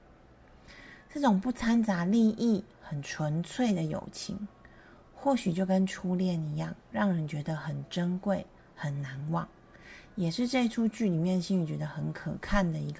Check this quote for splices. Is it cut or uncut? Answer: cut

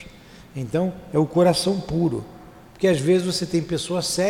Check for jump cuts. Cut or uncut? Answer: uncut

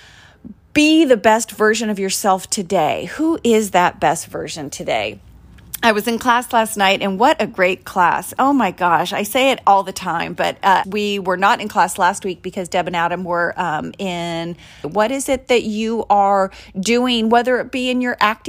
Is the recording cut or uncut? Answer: cut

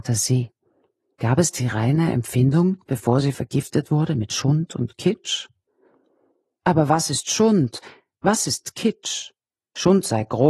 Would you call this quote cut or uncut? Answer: uncut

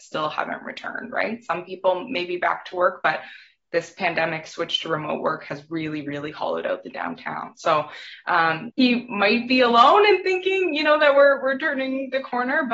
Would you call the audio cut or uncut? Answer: cut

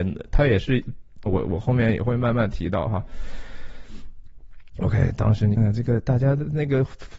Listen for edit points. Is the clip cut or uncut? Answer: cut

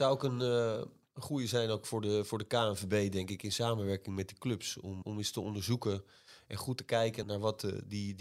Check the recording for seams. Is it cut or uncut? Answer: cut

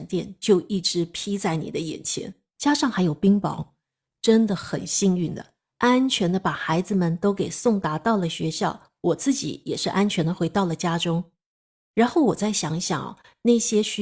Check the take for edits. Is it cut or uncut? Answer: uncut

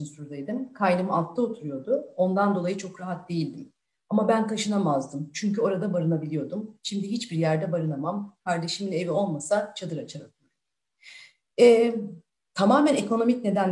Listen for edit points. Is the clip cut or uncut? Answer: uncut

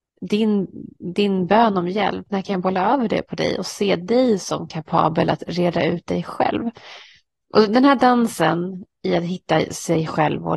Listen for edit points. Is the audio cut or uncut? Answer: uncut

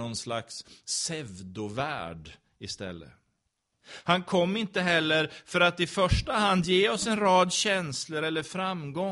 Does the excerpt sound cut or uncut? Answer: cut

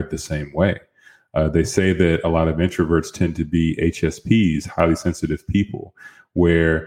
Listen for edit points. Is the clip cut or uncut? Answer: uncut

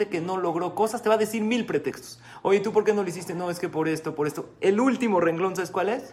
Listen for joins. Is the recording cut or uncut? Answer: uncut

